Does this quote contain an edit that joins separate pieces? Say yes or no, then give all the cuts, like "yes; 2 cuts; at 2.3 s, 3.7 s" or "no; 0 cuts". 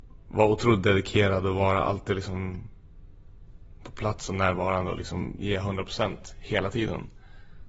no; 0 cuts